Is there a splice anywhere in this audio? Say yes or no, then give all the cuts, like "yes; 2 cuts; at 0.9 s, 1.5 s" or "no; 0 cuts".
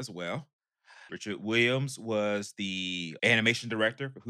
yes; 2 cuts; at 1.1 s, 3.2 s